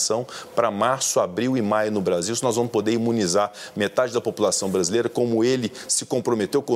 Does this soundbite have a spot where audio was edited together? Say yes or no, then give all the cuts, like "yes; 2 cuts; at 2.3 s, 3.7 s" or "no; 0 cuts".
no; 0 cuts